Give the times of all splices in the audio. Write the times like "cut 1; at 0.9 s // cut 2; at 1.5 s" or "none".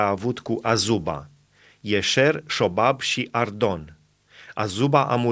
none